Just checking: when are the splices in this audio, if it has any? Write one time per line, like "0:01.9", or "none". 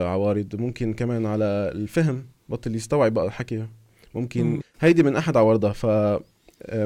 0:04.6

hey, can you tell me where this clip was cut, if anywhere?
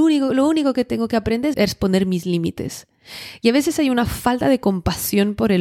0:01.5

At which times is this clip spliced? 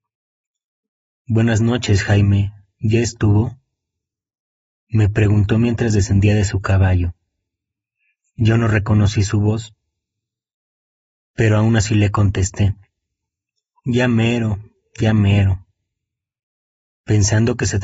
none

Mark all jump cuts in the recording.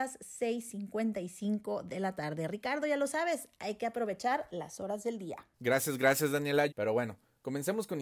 0:05.5
0:06.7

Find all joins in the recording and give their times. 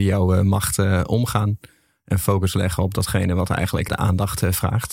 0:03.9

